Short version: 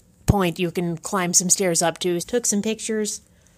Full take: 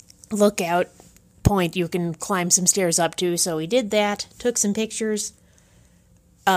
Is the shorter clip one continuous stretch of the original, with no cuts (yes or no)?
no